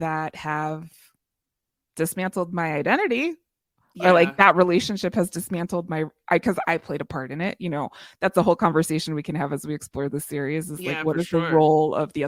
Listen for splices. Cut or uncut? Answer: uncut